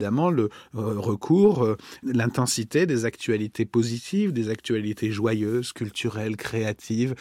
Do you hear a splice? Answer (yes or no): no